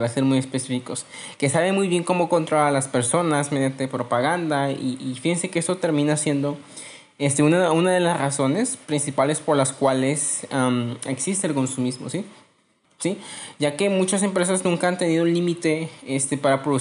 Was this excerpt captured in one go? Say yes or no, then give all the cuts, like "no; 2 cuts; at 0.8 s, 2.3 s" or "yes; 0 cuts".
no; 1 cut; at 12.8 s